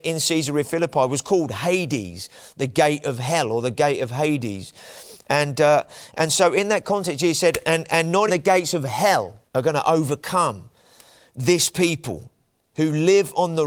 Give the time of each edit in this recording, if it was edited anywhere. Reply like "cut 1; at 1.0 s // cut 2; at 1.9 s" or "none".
cut 1; at 8.3 s // cut 2; at 9.5 s